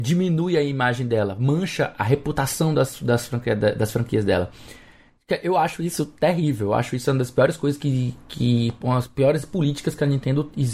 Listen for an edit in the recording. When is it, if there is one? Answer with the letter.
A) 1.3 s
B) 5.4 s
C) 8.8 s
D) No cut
D